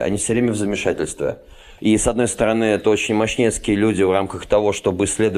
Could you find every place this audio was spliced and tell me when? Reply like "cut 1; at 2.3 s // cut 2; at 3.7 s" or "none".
cut 1; at 1.8 s